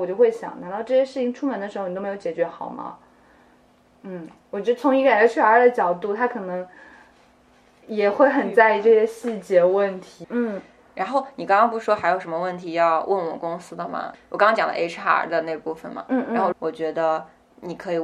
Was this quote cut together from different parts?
yes; 3 cuts; at 10.2 s, 14.1 s, 16.5 s

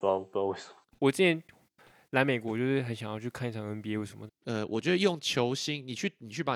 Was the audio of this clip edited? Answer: yes; 2 cuts; at 0.9 s, 4.3 s

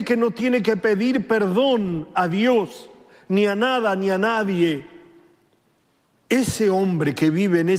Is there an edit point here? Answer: no; 0 cuts

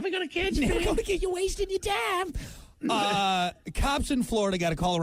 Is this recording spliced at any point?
no; 0 cuts

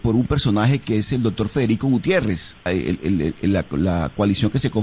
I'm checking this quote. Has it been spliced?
yes; 1 cut; at 2.7 s

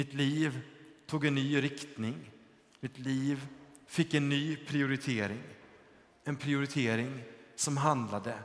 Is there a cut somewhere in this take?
no; 0 cuts

